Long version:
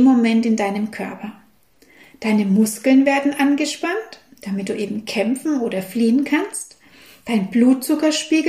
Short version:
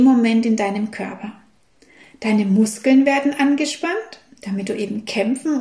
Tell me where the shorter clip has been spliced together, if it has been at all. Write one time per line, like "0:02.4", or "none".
none

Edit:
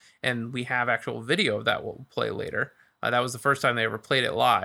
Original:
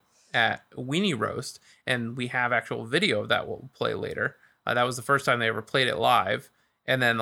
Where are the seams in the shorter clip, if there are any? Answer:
none

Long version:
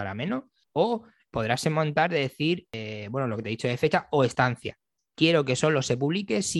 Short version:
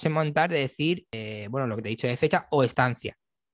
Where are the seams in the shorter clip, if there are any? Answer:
none

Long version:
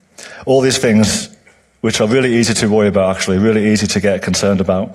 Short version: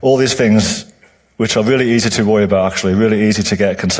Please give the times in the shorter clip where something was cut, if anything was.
none

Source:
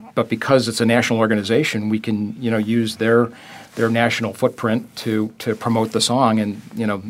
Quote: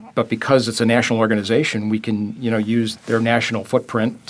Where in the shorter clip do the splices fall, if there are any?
0:03.0

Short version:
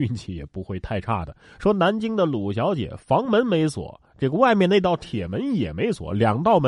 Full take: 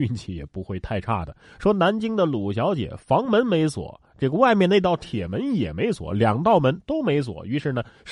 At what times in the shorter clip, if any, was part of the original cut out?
none

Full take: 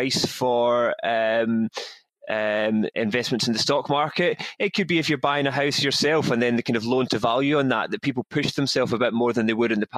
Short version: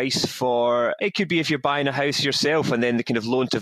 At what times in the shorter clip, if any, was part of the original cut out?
0:01.0

